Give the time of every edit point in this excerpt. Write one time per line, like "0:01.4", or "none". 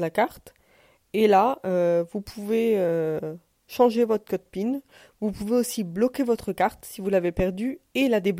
none